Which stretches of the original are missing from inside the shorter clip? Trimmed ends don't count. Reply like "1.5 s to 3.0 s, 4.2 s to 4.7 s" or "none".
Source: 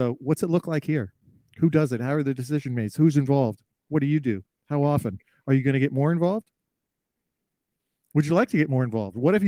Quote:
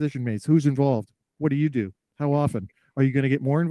none